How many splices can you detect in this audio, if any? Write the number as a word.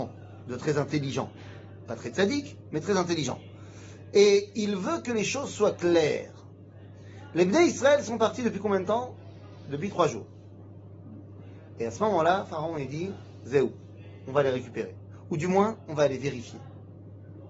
zero